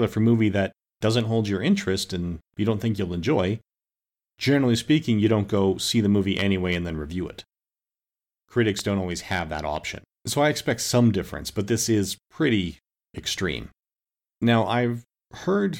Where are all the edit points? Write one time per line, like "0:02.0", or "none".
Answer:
0:10.1
0:14.3